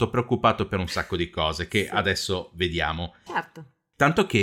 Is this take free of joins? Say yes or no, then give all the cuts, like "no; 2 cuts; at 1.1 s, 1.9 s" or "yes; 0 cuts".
no; 1 cut; at 3.3 s